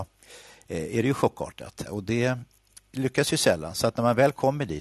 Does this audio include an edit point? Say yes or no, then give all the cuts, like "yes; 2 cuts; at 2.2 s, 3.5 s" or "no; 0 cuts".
yes; 1 cut; at 1.9 s